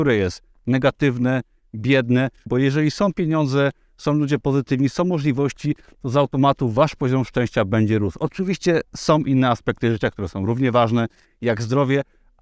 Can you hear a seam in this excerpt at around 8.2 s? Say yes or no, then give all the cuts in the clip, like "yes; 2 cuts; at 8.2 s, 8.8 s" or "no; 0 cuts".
no; 1 cut; at 2.5 s